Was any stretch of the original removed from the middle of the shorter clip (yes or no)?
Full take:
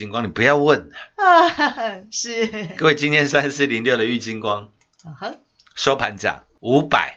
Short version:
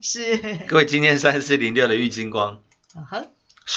no